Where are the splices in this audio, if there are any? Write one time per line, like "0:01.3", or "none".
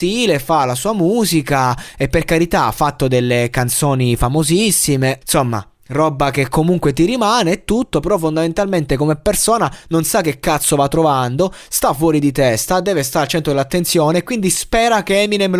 0:05.2